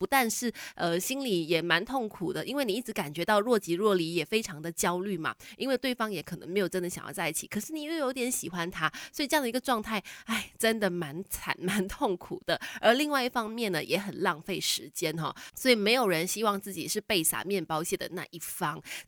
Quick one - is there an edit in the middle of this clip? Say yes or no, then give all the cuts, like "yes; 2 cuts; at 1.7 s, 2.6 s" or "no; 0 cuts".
no; 0 cuts